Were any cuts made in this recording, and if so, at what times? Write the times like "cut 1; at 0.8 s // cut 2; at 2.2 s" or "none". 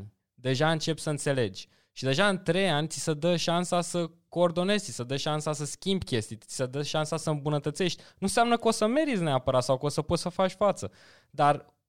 none

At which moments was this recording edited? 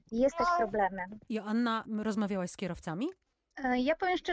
cut 1; at 1.3 s

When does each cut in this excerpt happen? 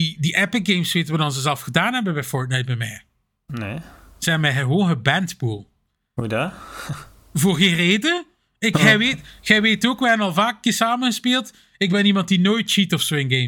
none

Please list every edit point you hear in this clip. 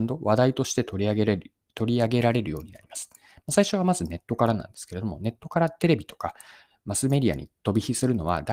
none

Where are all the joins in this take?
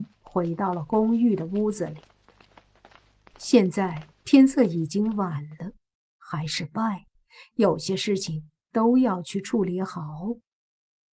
cut 1; at 6.2 s

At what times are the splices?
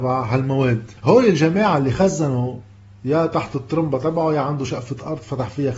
cut 1; at 1.0 s

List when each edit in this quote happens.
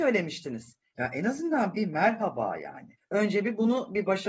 cut 1; at 0.9 s // cut 2; at 3.0 s

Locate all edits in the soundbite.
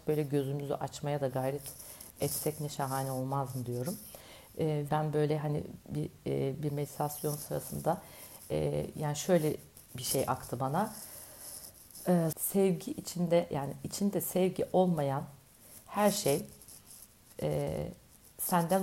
cut 1; at 4.9 s // cut 2; at 12.3 s

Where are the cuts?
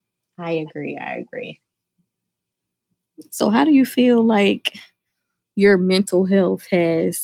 none

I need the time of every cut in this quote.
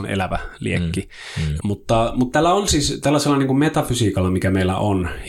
cut 1; at 1.6 s

